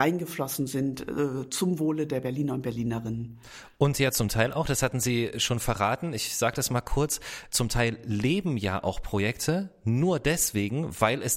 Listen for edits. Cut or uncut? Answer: uncut